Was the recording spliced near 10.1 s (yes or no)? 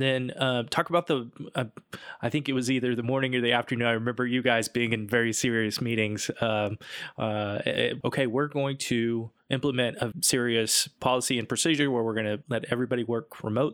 yes